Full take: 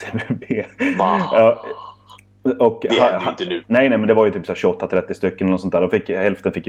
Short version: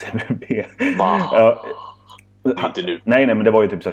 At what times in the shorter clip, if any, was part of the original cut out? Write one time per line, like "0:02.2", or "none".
0:02.6